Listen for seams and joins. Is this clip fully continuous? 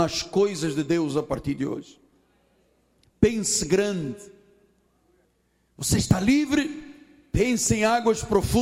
yes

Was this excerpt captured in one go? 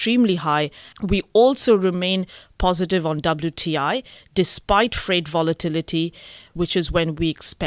no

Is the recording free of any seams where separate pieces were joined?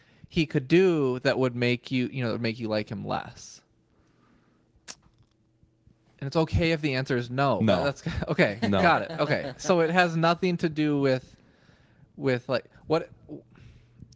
yes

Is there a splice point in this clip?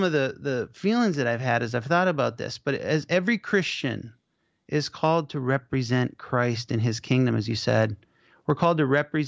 no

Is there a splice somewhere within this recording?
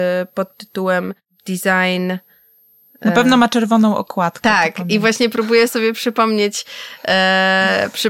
no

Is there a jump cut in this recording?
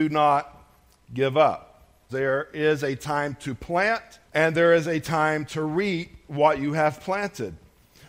yes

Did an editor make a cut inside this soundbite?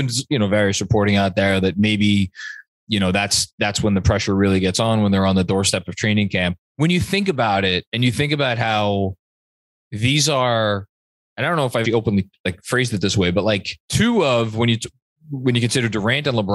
yes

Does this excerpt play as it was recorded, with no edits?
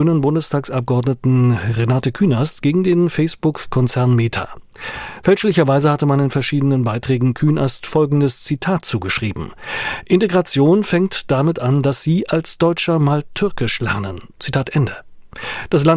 yes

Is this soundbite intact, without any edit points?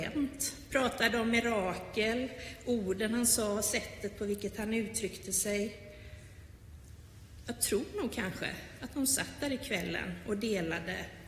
yes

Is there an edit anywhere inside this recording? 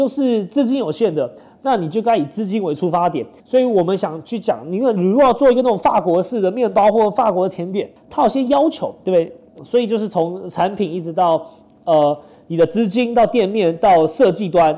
yes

